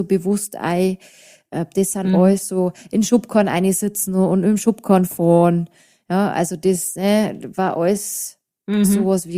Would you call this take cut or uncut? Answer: uncut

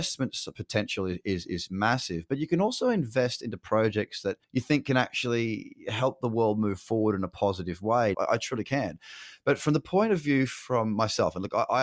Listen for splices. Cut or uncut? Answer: cut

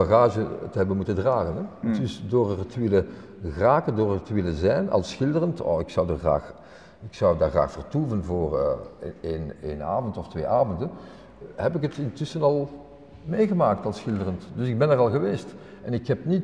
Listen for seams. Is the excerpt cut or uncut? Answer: uncut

